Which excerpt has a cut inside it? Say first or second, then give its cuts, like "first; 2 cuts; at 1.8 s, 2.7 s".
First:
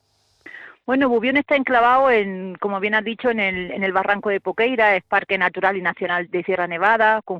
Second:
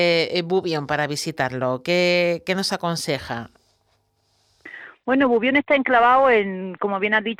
first; 1 cut; at 6.3 s